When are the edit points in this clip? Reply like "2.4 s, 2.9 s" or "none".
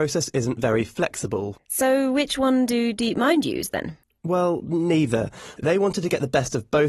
1.5 s